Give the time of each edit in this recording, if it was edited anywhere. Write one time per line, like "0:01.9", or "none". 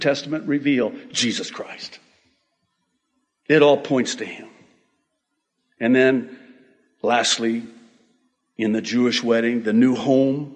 none